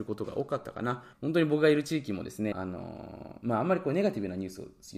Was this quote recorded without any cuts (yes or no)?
no